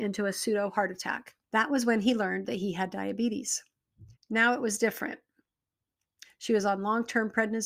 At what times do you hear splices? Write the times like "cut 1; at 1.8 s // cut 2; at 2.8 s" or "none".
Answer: cut 1; at 1.4 s // cut 2; at 4.2 s // cut 3; at 6.2 s